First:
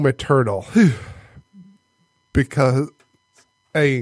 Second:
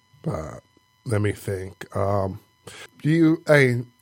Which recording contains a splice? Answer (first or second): second